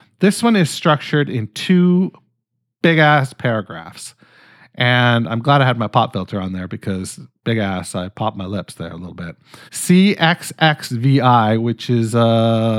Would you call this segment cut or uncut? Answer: cut